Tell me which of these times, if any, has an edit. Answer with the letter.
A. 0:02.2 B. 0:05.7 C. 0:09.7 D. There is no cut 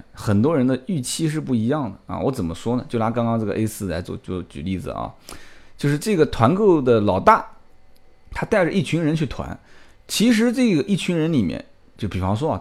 D